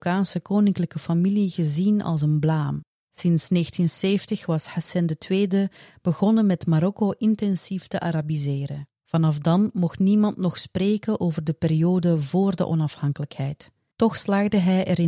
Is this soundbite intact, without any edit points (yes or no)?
no